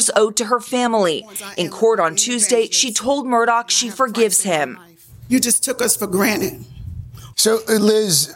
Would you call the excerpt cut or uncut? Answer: cut